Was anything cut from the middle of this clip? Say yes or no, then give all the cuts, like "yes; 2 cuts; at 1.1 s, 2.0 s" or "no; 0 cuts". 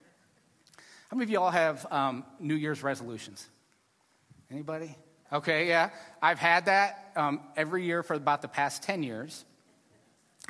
yes; 1 cut; at 5.2 s